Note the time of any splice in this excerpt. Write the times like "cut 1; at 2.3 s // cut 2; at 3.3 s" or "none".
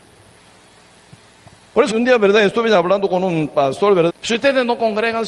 cut 1; at 1.9 s // cut 2; at 4.1 s